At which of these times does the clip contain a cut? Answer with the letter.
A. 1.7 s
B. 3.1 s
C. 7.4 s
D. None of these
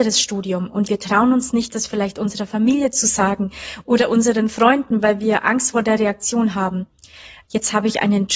C